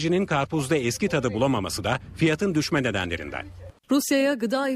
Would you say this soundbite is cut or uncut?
cut